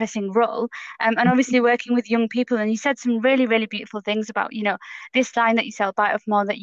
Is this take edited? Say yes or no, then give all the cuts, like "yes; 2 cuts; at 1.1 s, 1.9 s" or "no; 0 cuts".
no; 0 cuts